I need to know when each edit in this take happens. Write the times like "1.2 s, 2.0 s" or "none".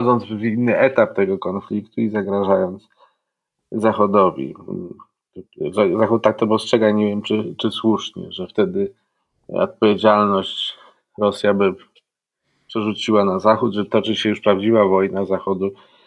none

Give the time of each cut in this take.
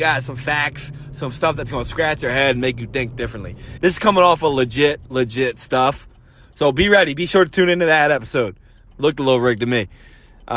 3.8 s, 8.9 s

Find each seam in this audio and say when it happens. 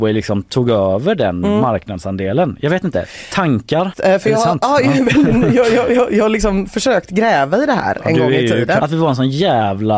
3.9 s, 8.8 s

